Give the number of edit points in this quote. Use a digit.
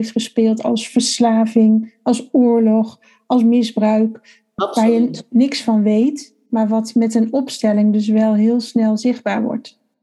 1